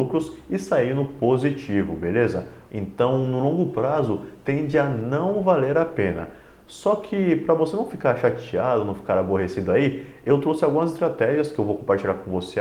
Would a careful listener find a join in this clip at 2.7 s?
yes; 1 cut; at 2.7 s

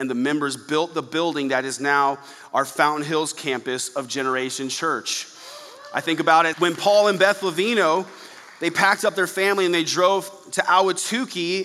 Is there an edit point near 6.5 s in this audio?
yes; 1 cut; at 6.5 s

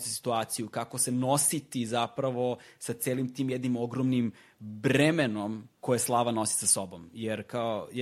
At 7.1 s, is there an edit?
no; 1 cut; at 5.7 s

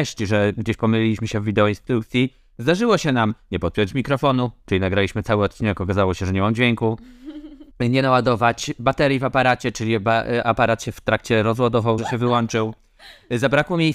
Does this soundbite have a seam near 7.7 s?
yes; 2 cuts; at 7.7 s, 12.0 s

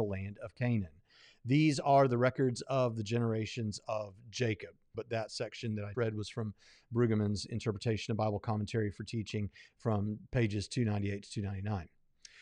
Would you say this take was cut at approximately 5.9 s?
yes; 2 cuts; at 4.9 s, 5.9 s

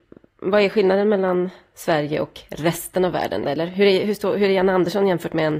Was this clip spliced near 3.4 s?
yes; 1 cut; at 3.4 s

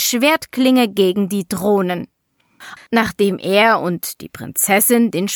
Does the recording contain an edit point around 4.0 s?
no; 1 cut; at 2.8 s

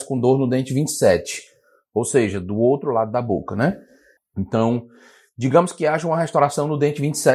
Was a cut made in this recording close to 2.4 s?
no; 1 cut; at 4.2 s

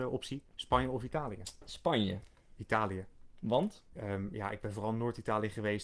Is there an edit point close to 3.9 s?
yes; 1 cut; at 3.9 s

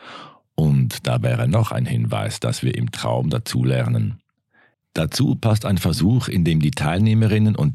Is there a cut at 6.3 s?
no; 1 cut; at 4.7 s

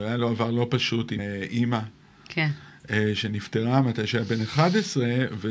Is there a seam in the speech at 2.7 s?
no; 1 cut; at 1.2 s

